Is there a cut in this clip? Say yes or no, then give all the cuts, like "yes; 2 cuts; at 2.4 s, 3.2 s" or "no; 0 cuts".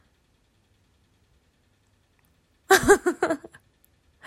yes; 1 cut; at 2.3 s